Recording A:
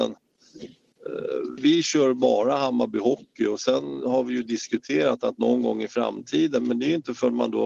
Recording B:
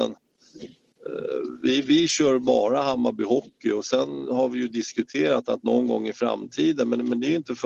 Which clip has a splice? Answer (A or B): A